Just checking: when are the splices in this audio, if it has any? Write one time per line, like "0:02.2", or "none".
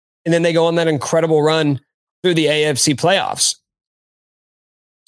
none